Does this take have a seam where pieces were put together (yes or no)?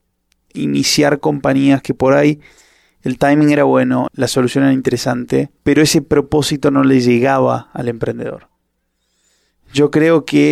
yes